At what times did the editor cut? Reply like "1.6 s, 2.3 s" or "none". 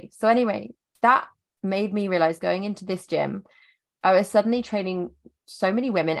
none